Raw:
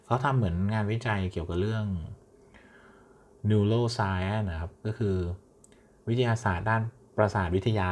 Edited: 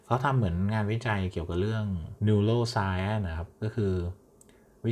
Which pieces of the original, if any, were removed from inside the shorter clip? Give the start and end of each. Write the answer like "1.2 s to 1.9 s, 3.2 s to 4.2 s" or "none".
2.2 s to 3.4 s